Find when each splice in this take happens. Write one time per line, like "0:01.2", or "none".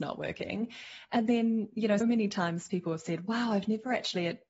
0:02.0